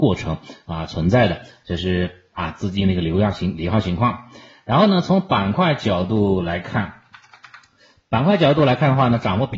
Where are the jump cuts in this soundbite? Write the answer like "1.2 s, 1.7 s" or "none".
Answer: none